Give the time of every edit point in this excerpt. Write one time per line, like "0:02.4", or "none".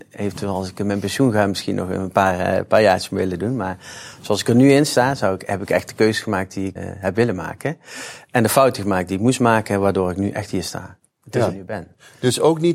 0:06.8
0:11.5